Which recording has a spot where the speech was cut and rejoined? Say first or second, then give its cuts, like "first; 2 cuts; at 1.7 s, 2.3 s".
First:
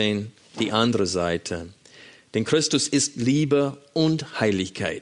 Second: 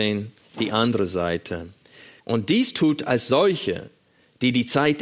second; 1 cut; at 2.2 s